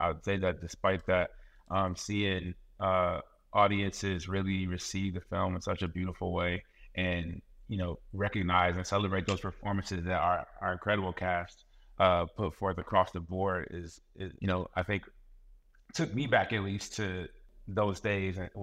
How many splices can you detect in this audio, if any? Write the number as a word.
one